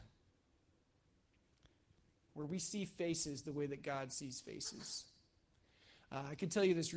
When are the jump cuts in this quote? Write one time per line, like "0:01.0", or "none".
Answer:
0:02.3